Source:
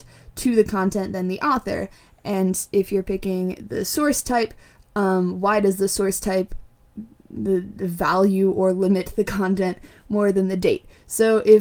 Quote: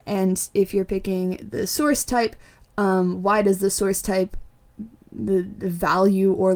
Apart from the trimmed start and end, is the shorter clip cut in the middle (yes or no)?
no